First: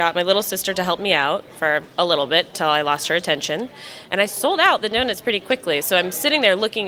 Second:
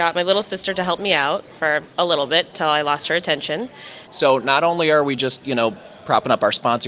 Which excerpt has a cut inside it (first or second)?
second